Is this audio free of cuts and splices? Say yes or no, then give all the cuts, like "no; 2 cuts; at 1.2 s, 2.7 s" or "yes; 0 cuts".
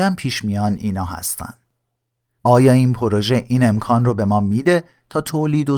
yes; 0 cuts